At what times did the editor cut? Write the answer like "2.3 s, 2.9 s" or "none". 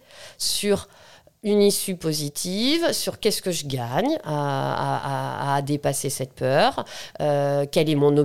none